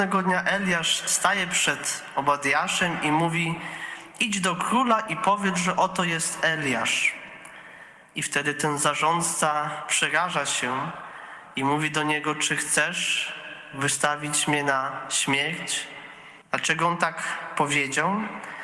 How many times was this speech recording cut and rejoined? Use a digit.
1